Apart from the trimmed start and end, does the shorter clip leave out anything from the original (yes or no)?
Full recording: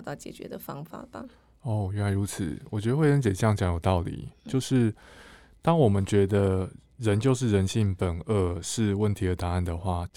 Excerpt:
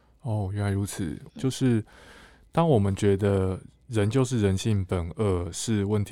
yes